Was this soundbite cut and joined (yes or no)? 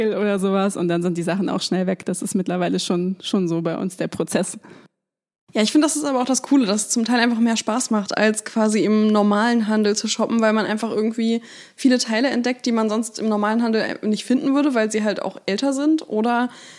no